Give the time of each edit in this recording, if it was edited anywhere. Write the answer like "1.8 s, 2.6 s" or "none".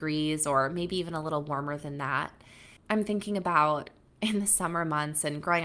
2.8 s

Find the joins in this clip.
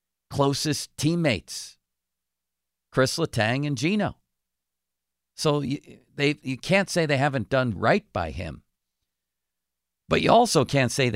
7.7 s

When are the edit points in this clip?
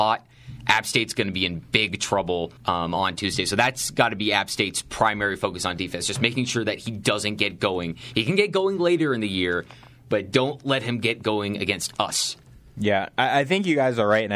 2.6 s

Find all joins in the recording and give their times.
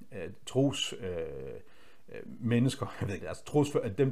3.2 s

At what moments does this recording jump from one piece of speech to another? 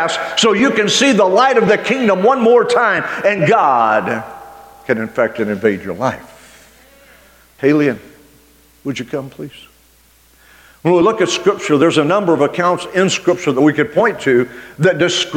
7.6 s

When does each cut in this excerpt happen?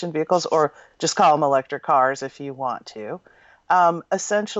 none

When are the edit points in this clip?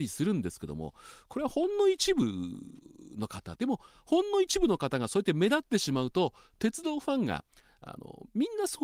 3.6 s

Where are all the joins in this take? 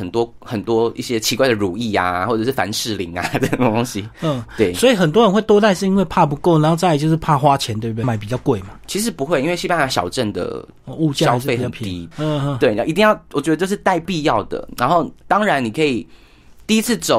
8.0 s, 12.1 s

